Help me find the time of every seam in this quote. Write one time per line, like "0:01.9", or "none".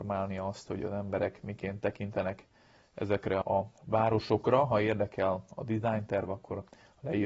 0:03.4